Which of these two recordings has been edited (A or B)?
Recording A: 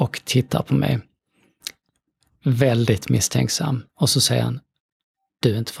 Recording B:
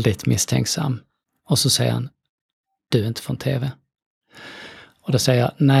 A